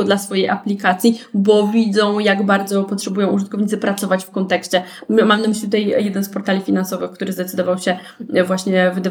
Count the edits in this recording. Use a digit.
0